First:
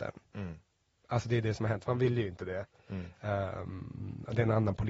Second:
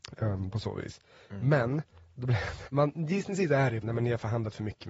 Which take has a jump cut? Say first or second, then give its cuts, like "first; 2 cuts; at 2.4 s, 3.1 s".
second; 2 cuts; at 2.7 s, 3.8 s